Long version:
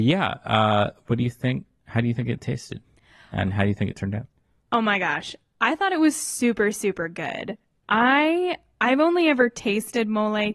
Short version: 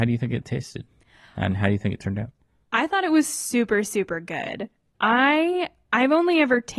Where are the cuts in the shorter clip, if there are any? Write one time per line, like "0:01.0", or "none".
0:02.6